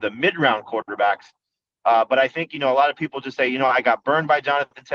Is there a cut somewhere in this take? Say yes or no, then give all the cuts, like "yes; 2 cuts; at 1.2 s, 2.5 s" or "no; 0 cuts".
no; 0 cuts